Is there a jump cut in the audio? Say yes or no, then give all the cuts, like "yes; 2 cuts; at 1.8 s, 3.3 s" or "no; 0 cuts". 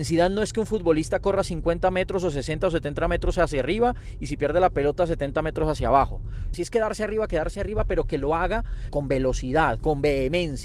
yes; 2 cuts; at 6.5 s, 8.9 s